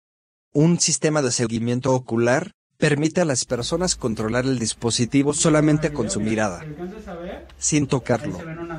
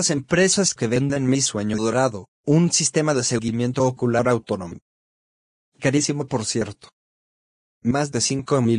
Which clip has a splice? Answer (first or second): second